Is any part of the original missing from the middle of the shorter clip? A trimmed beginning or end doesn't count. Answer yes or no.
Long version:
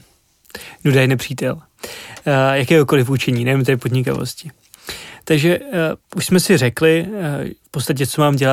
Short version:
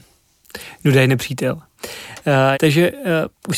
yes